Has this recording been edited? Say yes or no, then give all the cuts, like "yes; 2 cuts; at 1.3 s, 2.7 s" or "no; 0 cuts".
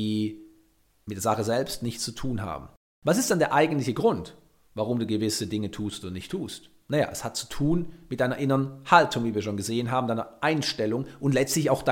no; 0 cuts